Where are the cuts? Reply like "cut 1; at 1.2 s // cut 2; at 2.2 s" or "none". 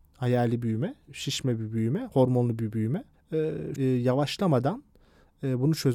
cut 1; at 3.8 s